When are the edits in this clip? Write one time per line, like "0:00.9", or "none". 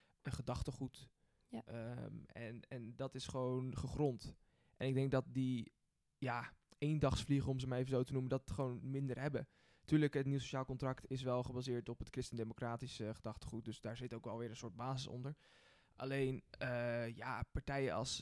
none